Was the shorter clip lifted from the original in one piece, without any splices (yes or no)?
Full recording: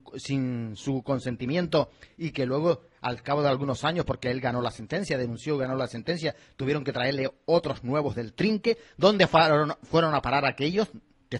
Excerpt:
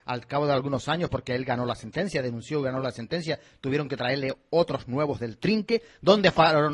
yes